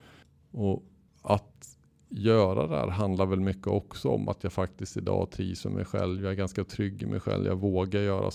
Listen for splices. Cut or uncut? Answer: uncut